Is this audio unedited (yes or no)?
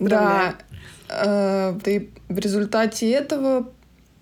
no